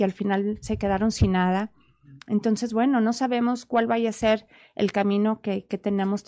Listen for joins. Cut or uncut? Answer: uncut